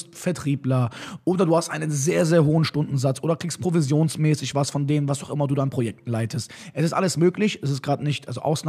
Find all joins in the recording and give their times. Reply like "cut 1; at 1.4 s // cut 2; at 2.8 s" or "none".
none